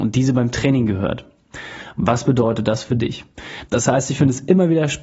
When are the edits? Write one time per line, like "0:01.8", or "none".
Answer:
0:03.7